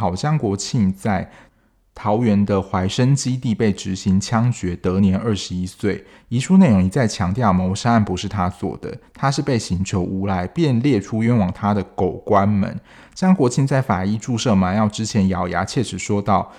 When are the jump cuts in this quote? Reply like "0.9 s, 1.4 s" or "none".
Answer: 6.1 s

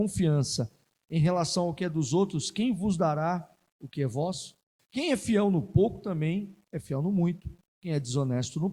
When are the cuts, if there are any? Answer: 4.8 s

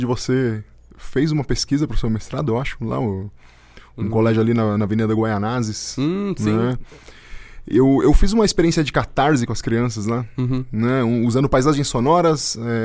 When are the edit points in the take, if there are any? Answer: none

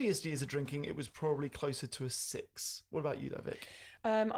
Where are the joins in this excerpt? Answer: none

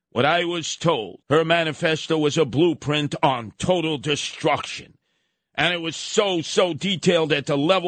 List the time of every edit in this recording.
1.2 s

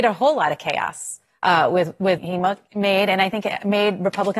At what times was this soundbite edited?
2.2 s

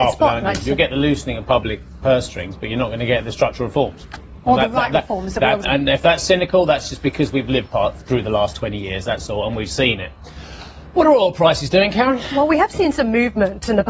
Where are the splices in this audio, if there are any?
5.6 s

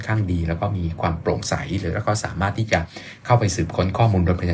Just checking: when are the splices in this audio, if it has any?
none

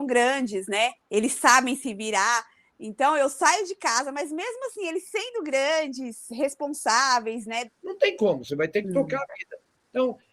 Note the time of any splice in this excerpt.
7.7 s

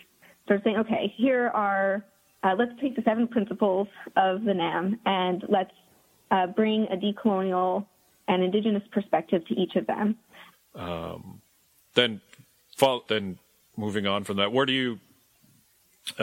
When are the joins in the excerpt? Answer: 10.5 s, 13.1 s

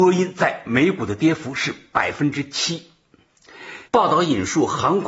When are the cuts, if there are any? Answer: 3.9 s

